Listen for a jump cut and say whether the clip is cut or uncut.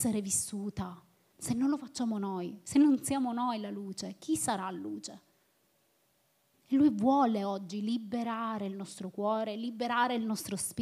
cut